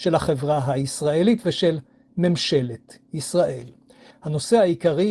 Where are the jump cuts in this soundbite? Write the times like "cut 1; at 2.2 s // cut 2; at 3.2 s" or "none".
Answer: cut 1; at 4.1 s